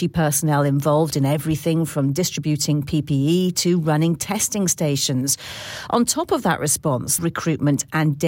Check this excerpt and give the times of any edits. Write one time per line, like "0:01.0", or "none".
0:07.2